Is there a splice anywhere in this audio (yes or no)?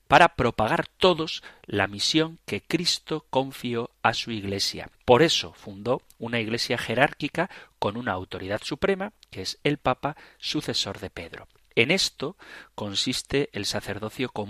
yes